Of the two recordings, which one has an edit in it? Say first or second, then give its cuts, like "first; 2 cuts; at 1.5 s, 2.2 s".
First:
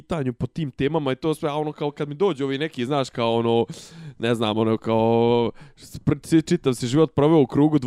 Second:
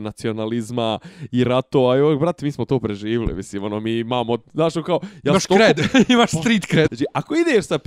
second; 1 cut; at 6.9 s